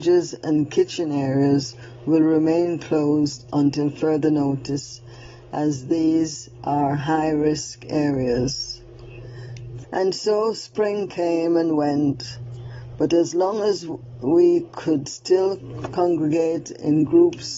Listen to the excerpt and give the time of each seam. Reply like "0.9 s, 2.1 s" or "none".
9.8 s